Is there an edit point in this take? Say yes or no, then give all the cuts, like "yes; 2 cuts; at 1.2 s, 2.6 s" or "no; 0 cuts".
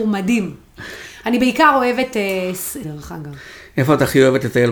yes; 1 cut; at 2.8 s